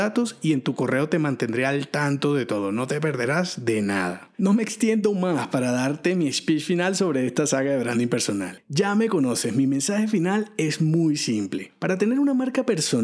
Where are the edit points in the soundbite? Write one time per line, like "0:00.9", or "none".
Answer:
none